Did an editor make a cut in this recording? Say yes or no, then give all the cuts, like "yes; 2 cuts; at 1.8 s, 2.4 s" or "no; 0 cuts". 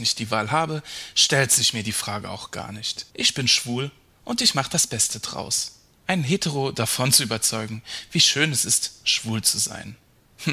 yes; 2 cuts; at 3.1 s, 5.9 s